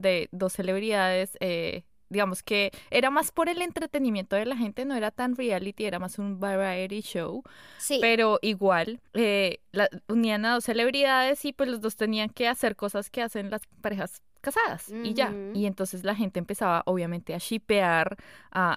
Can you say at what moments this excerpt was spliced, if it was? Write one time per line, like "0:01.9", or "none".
0:09.1